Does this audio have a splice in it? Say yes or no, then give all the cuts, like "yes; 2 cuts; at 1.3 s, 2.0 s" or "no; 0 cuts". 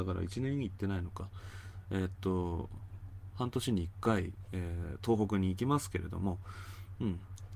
no; 0 cuts